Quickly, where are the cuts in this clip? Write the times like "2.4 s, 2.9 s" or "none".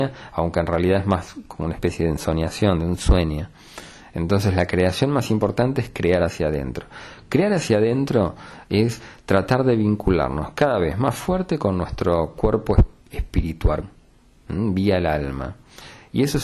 13.8 s

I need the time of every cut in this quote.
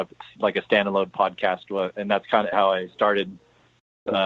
2.5 s

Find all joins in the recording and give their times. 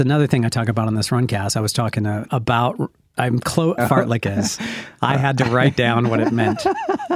2.3 s, 3.8 s

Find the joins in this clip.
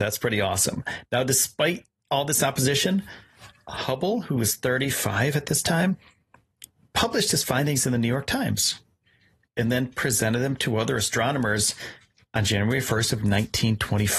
none

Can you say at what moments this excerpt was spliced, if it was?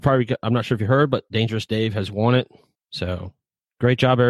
2.7 s

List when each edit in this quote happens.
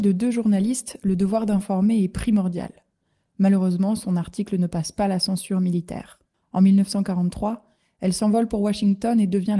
6.3 s

